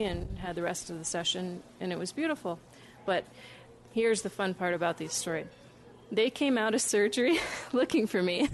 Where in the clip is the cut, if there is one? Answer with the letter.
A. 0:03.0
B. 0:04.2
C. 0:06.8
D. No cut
A